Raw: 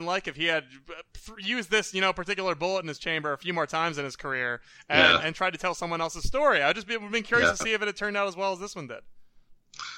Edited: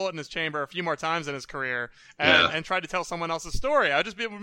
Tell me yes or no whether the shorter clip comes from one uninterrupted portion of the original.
yes